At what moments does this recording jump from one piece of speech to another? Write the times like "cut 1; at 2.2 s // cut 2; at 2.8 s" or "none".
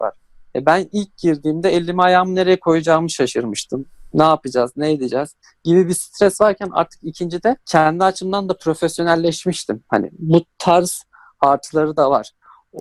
cut 1; at 7.6 s